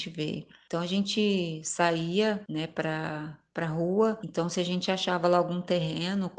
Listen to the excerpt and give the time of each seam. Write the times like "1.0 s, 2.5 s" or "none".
none